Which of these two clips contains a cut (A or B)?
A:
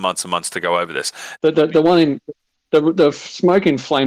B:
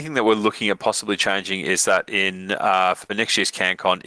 A